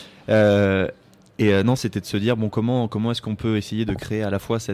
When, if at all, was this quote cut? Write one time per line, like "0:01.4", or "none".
0:01.8